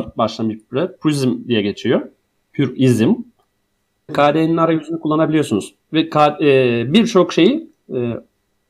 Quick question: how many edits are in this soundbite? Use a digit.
1